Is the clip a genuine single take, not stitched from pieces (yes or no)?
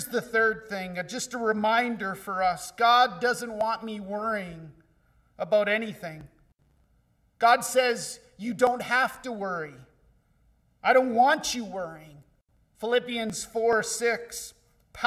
yes